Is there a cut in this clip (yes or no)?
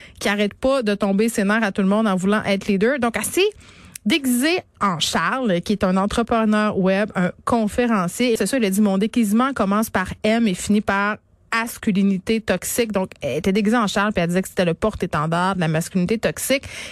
yes